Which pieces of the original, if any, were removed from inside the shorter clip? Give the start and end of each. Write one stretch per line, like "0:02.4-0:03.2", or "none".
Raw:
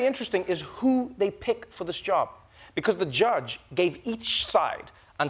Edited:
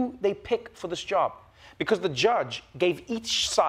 none